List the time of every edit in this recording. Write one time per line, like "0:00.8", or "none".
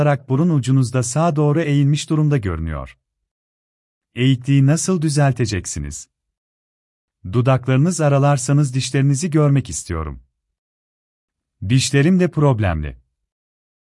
0:07.1